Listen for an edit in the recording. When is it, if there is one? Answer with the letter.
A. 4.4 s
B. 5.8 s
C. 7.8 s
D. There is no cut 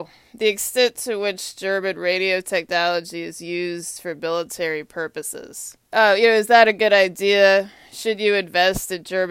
B